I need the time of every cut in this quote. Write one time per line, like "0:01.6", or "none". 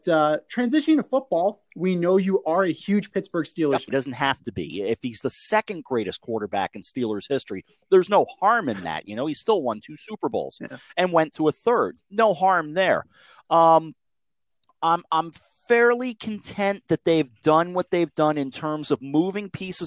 0:03.9
0:12.0